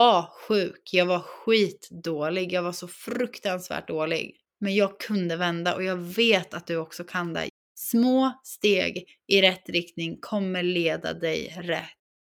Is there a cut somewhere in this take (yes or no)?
no